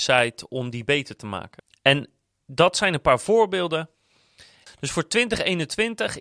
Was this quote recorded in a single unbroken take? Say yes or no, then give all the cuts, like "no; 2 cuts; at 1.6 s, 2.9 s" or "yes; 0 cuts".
no; 1 cut; at 4.7 s